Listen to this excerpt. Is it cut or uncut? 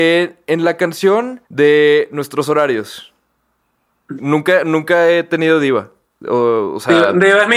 cut